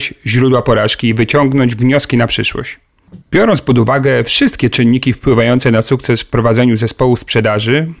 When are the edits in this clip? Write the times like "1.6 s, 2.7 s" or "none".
3.2 s